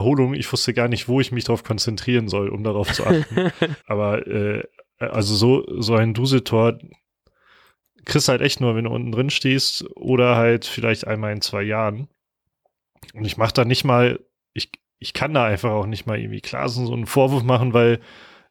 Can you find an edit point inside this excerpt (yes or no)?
yes